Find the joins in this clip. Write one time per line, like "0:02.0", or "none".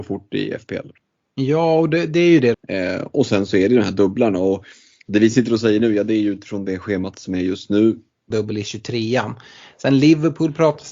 0:02.5
0:08.3